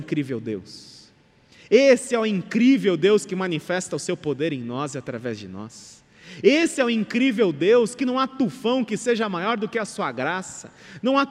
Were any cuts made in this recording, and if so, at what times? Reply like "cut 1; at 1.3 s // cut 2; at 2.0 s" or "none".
none